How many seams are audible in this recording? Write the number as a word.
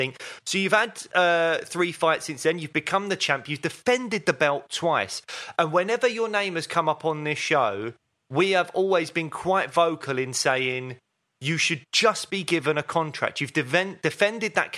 zero